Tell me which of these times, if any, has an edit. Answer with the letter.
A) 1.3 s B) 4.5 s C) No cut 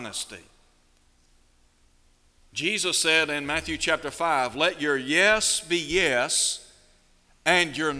C